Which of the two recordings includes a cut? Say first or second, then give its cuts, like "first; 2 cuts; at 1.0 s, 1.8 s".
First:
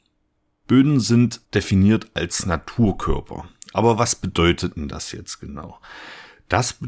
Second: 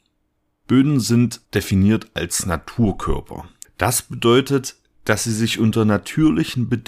second; 1 cut; at 3.6 s